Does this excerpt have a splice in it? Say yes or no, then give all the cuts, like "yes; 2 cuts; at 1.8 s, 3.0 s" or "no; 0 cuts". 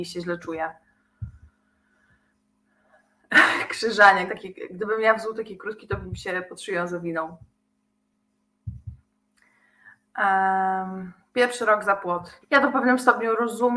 yes; 2 cuts; at 4.3 s, 12.4 s